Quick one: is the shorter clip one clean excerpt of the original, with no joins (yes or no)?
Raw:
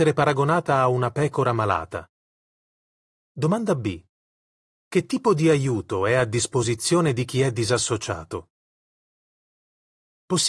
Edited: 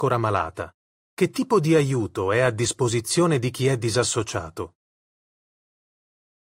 no